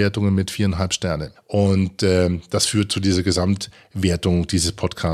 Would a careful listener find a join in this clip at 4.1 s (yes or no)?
no